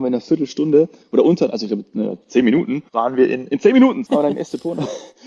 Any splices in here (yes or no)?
yes